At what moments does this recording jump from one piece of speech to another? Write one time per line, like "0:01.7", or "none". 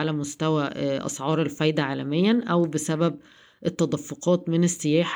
none